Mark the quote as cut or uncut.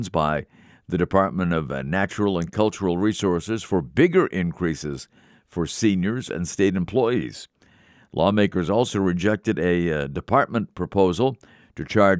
cut